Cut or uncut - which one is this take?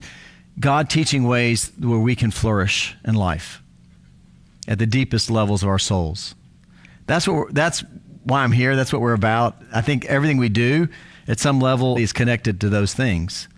cut